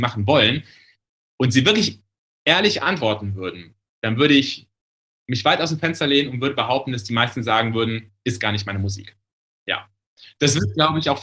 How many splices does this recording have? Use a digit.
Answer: 0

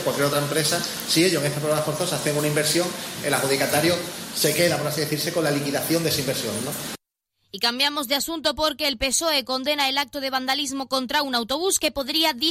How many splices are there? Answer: 0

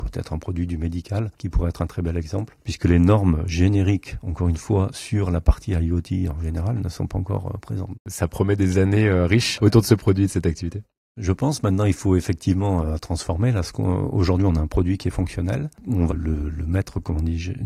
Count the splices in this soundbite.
2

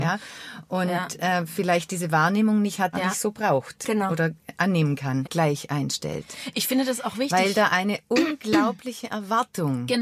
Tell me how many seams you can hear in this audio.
2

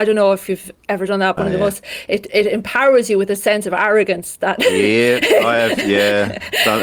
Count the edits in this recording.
1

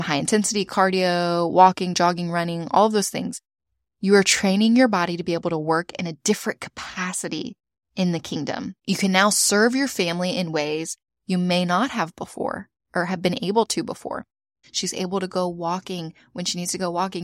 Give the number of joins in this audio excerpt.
1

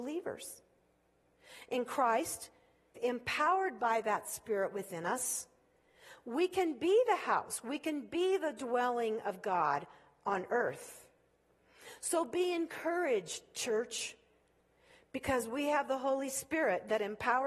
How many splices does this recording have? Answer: 1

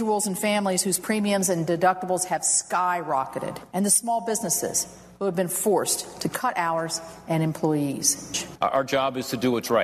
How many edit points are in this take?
1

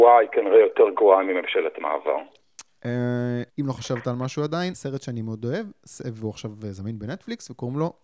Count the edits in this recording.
2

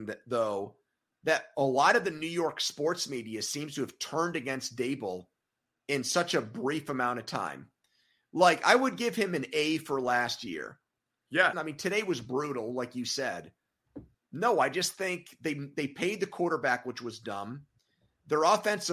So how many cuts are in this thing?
2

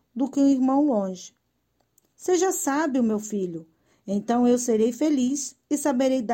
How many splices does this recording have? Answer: 0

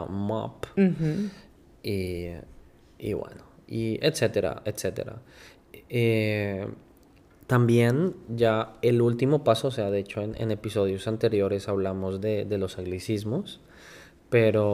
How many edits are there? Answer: 0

